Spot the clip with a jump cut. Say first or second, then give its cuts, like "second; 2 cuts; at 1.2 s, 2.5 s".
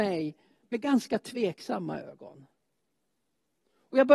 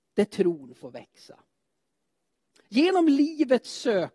second; 1 cut; at 2.6 s